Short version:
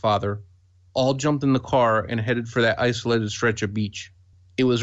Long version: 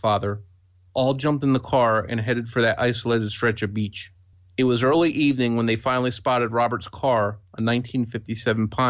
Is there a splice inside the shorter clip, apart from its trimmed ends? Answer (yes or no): no